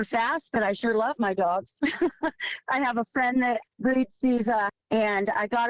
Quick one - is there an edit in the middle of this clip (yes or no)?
yes